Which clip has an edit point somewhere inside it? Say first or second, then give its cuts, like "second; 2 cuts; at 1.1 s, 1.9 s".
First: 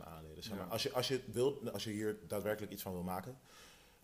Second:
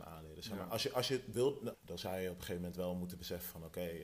second; 1 cut; at 1.7 s